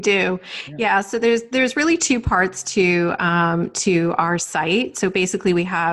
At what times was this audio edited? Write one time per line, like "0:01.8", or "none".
none